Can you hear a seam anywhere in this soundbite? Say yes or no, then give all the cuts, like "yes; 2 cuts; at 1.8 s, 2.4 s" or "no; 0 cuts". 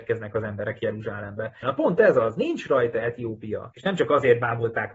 yes; 2 cuts; at 1.6 s, 3.7 s